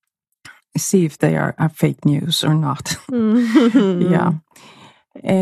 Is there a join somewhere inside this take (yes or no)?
no